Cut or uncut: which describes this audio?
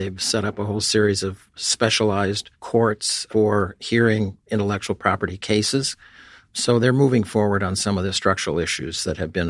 uncut